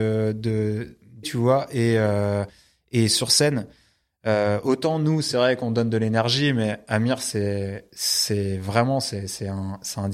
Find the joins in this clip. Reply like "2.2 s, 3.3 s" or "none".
1.2 s